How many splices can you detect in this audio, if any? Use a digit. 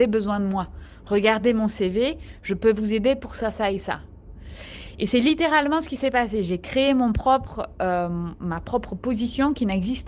0